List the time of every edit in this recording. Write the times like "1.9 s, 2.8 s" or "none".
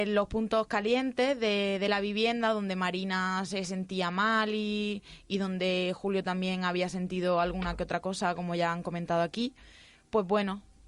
none